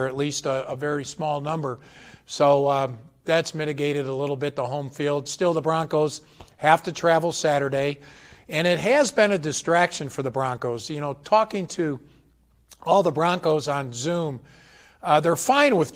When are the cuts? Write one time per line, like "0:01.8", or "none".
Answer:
none